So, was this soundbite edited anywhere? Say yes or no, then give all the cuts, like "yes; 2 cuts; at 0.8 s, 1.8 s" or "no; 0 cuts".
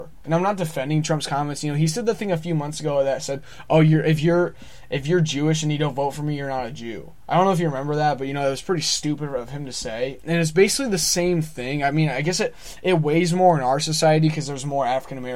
no; 0 cuts